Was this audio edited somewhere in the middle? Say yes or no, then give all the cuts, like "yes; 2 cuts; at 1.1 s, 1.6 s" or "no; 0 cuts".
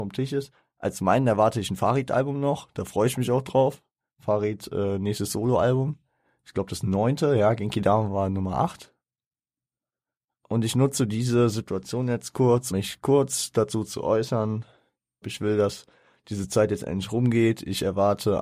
yes; 3 cuts; at 10.4 s, 12.7 s, 15.2 s